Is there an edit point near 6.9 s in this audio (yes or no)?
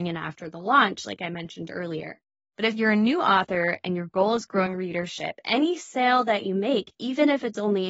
no